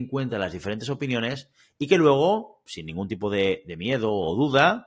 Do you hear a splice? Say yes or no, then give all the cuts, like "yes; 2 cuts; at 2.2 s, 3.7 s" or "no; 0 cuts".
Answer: no; 0 cuts